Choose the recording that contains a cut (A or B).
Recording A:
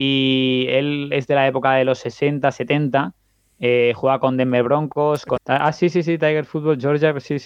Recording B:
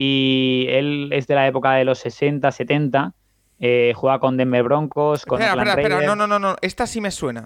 A